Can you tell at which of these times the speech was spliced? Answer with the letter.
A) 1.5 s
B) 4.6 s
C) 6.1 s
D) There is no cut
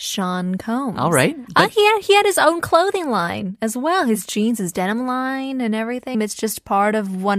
C